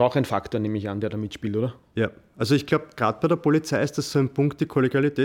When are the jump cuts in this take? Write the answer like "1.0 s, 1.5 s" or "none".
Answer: none